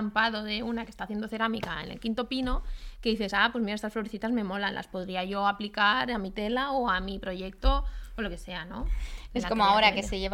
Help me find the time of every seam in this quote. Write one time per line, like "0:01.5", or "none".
none